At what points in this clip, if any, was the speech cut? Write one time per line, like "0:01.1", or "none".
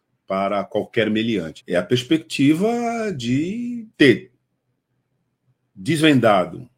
0:01.6
0:03.9